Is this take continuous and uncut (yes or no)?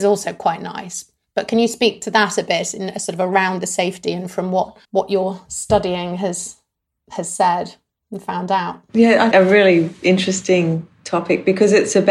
no